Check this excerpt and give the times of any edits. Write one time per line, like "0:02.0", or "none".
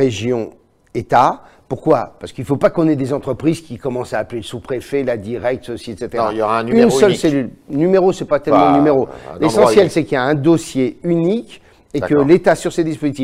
none